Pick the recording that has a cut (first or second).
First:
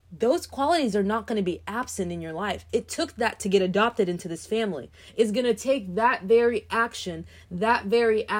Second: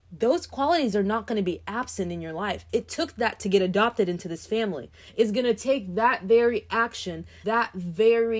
second